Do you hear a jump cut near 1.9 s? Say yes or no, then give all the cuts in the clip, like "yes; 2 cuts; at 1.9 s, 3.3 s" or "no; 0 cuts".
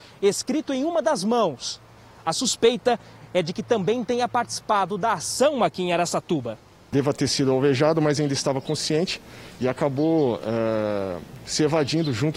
no; 0 cuts